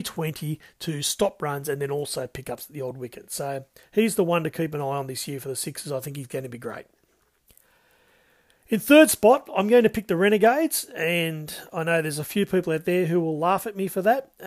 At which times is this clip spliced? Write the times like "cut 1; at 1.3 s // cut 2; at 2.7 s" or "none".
none